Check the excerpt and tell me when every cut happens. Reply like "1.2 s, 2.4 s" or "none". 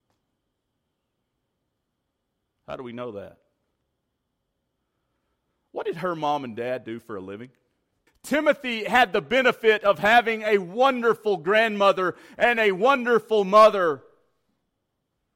8.1 s